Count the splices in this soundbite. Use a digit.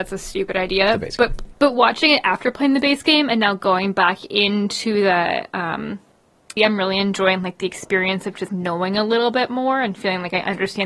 3